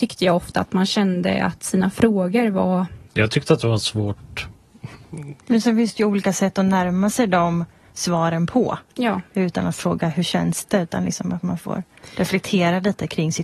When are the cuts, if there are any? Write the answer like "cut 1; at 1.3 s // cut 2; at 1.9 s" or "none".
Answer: cut 1; at 3.1 s // cut 2; at 5.4 s